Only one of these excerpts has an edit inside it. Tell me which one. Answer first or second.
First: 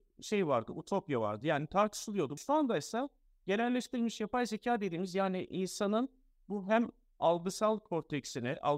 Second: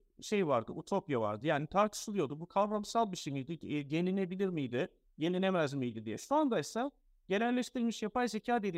first